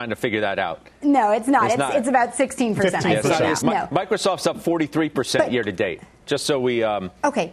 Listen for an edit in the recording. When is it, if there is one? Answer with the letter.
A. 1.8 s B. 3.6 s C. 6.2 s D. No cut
B